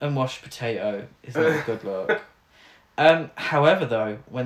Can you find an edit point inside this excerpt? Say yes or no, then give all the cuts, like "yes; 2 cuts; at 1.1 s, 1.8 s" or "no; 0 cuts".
no; 0 cuts